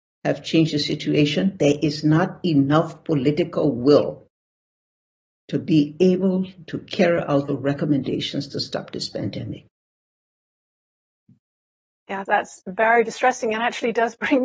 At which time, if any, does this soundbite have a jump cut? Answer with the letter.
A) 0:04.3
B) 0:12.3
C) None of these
B